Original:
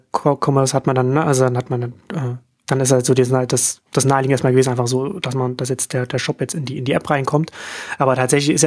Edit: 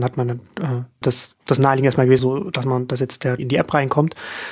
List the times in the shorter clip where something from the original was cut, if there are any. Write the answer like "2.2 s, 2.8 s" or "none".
1.0 s, 2.2 s, 3.4 s